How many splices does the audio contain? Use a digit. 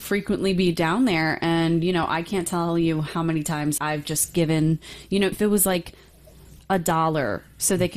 2